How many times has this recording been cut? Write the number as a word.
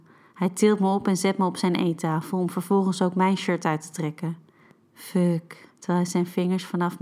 one